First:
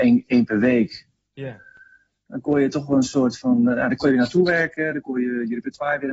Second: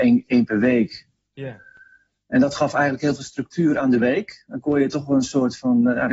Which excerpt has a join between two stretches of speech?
first; 1 cut; at 2.3 s

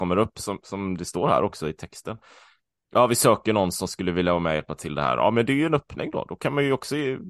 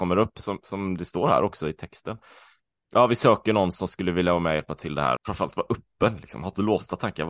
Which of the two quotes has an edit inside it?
second; 1 cut; at 5.2 s

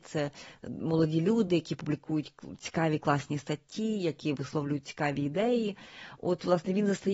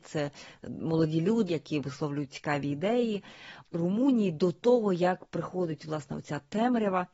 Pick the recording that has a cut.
second; 2 cuts; at 1.5 s, 3.6 s

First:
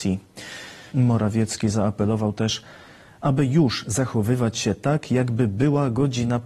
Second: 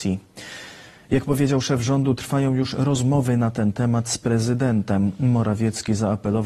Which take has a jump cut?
first; 1 cut; at 0.9 s

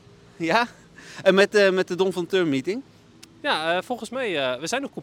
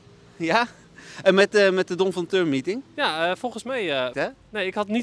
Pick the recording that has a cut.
second; 2 cuts; at 2.9 s, 4.1 s

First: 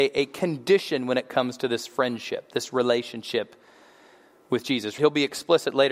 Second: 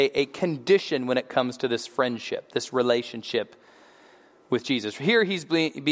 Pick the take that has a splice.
first; 1 cut; at 5.0 s

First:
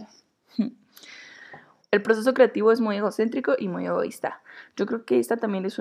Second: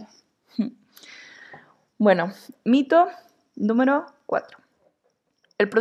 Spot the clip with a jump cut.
first; 1 cut; at 1.8 s

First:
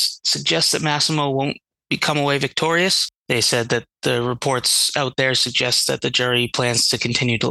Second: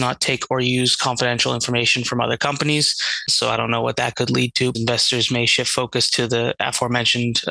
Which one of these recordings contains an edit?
second; 2 cuts; at 3.3 s, 4.7 s

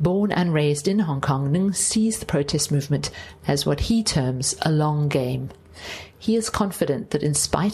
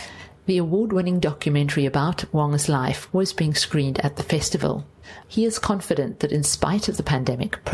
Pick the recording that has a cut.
second; 2 cuts; at 3.1 s, 5.2 s

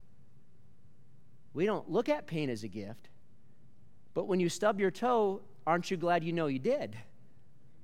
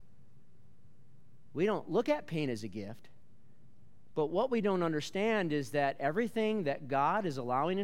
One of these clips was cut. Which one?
second; 1 cut; at 4.1 s

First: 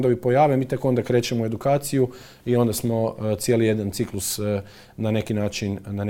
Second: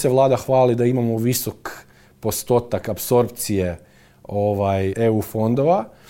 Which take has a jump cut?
second; 1 cut; at 4.9 s

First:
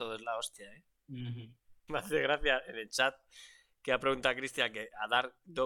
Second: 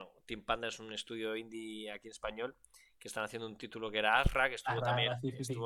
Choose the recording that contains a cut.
first; 1 cut; at 1.9 s

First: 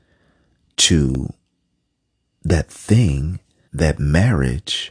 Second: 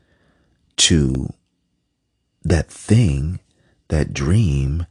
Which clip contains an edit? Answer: first; 1 cut; at 3.7 s

